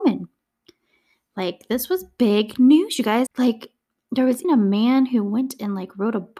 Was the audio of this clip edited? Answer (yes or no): yes